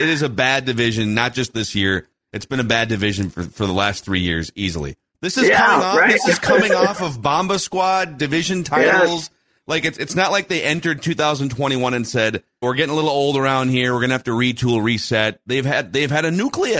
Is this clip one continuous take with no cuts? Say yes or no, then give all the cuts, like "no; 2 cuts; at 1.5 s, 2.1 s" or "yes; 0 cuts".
no; 2 cuts; at 5.1 s, 12.6 s